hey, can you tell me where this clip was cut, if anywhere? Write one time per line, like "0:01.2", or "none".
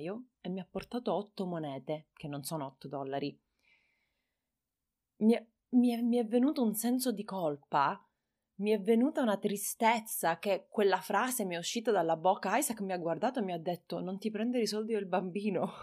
none